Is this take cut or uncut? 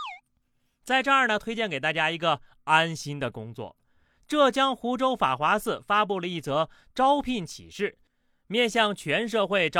uncut